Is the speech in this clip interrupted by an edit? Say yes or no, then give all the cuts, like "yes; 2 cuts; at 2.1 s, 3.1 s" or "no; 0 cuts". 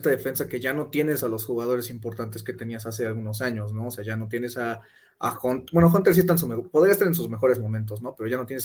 no; 0 cuts